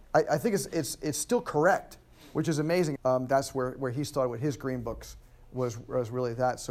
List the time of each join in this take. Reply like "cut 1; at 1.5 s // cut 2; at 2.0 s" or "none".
cut 1; at 3.0 s